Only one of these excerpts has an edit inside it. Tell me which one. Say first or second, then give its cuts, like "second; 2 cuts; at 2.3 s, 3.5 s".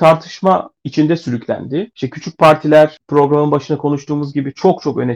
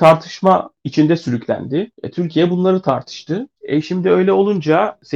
second; 1 cut; at 1.9 s